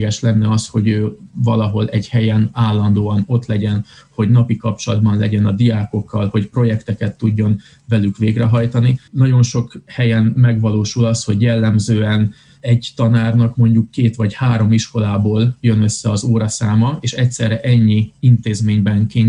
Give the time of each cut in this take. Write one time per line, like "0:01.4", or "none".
0:09.1